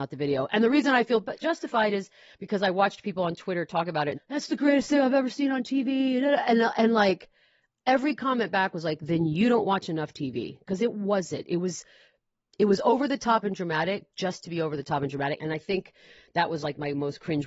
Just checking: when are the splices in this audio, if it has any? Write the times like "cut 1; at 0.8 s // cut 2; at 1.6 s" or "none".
cut 1; at 4.1 s // cut 2; at 15.4 s